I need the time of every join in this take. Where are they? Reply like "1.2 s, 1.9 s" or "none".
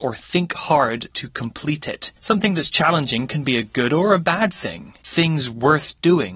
2.2 s, 5.0 s